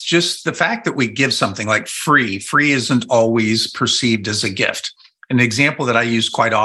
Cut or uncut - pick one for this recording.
uncut